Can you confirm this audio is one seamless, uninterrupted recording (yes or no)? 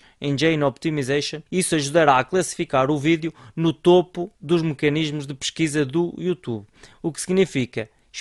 no